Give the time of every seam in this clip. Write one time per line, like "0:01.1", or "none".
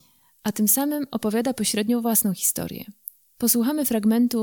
0:03.2